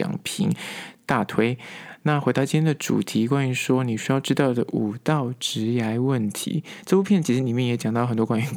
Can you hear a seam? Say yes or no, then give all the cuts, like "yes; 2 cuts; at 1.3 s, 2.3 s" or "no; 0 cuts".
no; 0 cuts